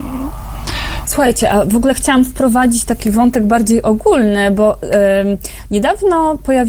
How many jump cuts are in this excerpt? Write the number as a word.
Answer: one